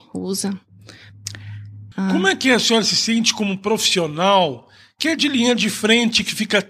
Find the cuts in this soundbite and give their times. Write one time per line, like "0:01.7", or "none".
0:01.9